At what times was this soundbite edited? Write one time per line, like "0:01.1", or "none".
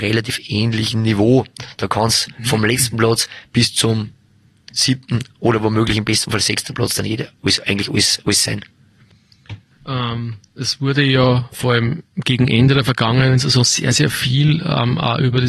none